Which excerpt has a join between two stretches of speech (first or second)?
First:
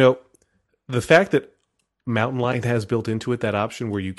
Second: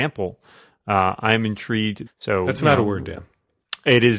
second